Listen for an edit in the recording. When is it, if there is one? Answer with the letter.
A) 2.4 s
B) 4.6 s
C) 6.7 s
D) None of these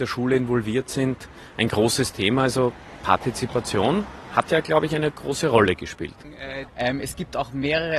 C